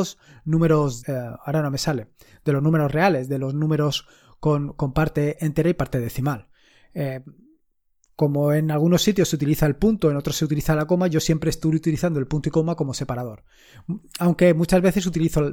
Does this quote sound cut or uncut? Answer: cut